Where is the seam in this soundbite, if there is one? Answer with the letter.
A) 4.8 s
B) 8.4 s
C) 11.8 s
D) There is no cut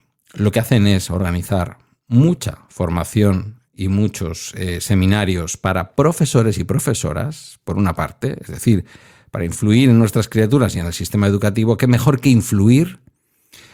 D